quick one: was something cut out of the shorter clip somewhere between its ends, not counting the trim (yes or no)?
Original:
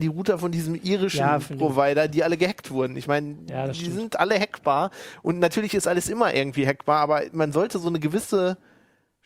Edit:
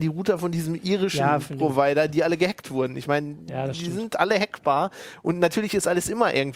no